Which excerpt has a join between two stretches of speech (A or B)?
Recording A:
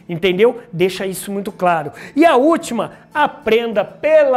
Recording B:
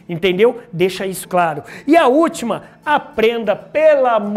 B